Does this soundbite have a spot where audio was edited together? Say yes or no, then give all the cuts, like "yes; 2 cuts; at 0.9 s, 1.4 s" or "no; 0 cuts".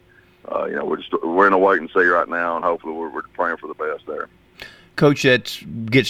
no; 0 cuts